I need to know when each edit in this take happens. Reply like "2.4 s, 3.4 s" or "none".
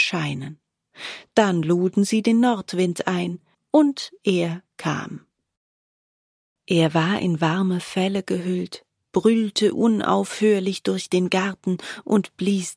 3.5 s